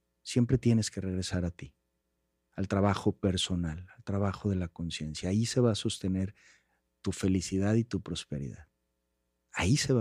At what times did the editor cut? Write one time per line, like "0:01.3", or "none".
none